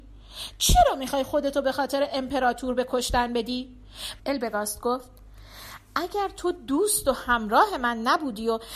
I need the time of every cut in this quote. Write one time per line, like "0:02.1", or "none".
0:04.2